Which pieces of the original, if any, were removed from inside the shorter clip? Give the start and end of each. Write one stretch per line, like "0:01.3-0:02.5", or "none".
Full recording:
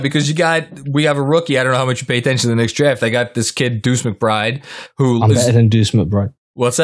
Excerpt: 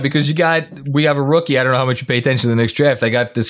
none